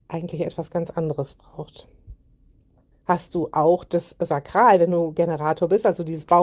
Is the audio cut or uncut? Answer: cut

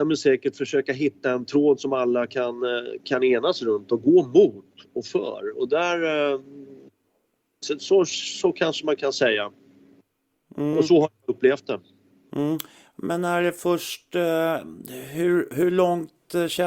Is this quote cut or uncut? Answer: uncut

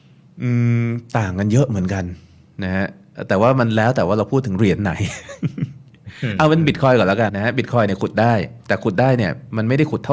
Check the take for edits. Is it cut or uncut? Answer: cut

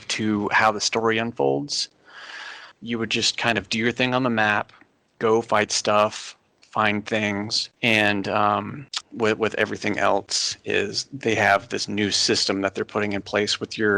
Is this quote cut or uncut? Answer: cut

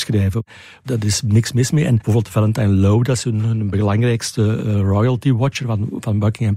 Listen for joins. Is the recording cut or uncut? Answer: uncut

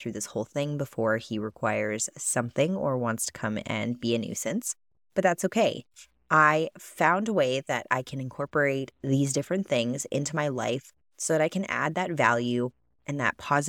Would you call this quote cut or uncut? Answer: uncut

